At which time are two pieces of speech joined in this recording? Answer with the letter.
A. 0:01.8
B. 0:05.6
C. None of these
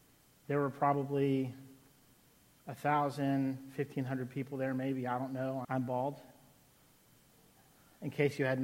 B